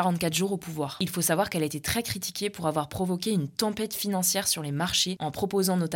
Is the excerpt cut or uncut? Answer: uncut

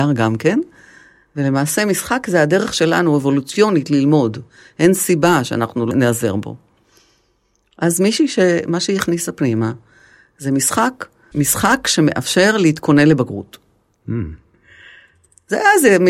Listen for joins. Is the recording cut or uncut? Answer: cut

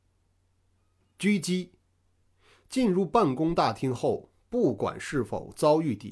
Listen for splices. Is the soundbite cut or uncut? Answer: uncut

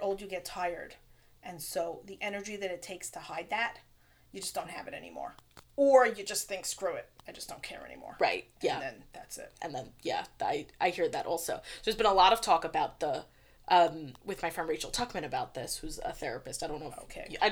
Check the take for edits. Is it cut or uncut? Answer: cut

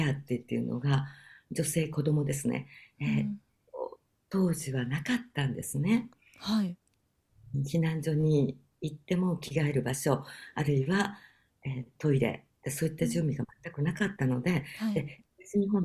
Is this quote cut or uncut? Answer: uncut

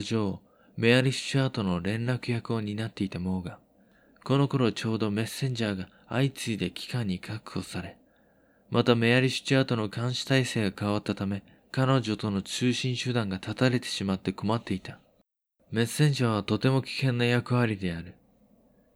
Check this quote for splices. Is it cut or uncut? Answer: uncut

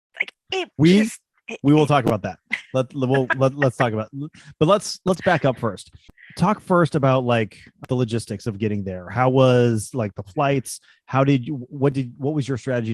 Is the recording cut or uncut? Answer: uncut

